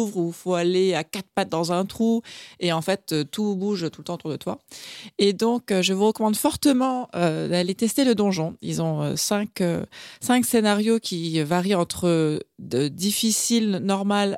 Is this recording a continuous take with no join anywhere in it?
yes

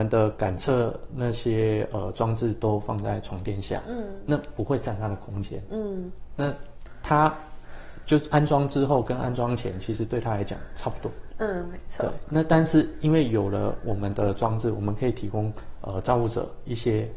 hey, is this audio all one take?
yes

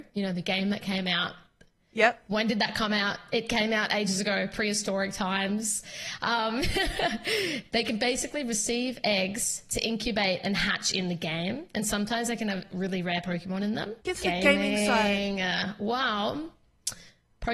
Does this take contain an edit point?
yes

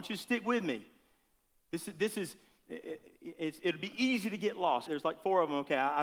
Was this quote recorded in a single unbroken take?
no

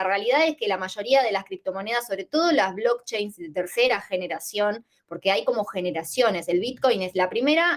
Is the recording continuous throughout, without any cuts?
yes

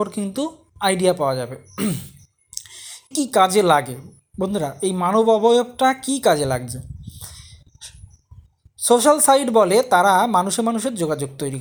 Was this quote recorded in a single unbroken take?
no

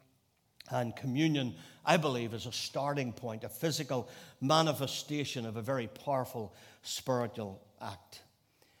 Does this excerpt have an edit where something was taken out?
no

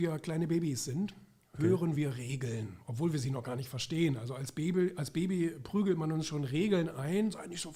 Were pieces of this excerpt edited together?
no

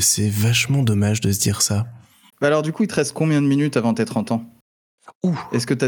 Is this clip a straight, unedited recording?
no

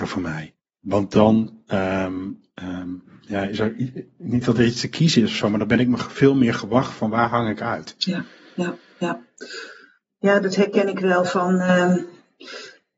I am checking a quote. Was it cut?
no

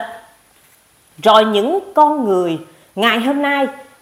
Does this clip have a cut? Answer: no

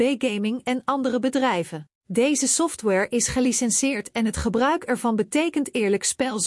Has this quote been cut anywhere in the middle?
yes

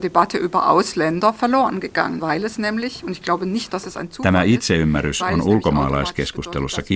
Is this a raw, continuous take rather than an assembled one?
no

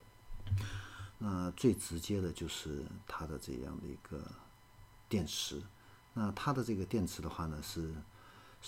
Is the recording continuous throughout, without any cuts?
no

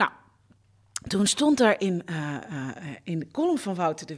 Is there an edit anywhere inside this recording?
no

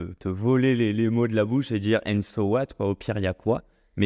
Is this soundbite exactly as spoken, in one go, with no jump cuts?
yes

